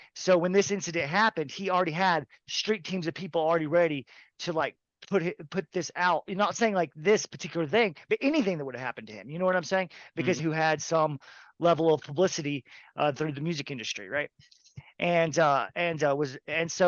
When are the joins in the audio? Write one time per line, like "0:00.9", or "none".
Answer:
0:10.4